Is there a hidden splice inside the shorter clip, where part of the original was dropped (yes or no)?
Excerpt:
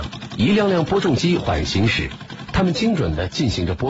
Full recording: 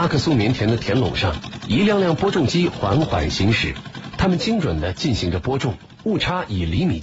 yes